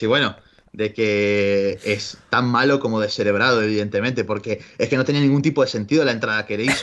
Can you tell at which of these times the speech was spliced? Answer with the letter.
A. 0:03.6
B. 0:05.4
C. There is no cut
C